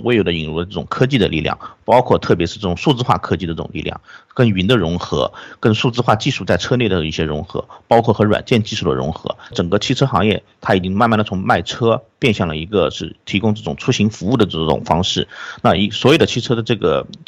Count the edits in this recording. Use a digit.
0